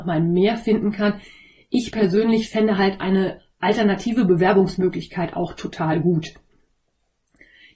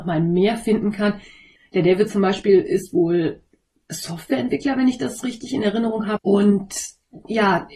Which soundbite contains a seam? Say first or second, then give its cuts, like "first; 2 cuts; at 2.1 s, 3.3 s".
second; 2 cuts; at 1.6 s, 6.2 s